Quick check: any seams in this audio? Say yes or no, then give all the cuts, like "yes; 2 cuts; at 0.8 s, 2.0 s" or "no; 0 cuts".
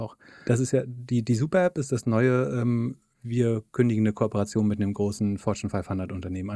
no; 0 cuts